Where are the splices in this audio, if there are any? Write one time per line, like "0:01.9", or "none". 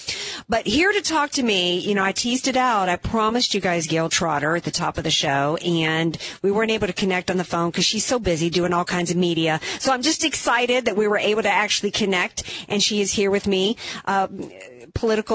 none